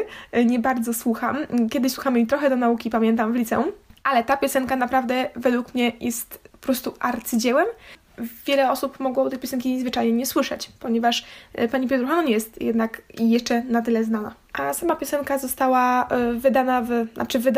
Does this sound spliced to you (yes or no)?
no